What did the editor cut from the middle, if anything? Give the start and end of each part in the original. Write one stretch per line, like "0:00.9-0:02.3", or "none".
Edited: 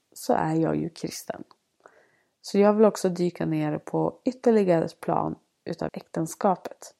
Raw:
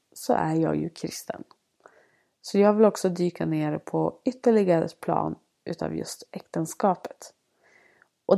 0:05.9-0:06.3